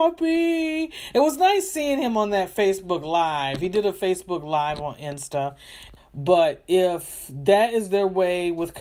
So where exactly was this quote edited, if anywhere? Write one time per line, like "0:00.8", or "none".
0:06.0